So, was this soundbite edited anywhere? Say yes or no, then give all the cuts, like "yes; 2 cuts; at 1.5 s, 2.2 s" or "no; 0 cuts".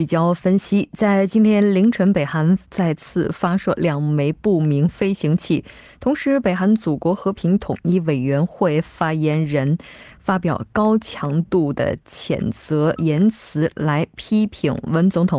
no; 0 cuts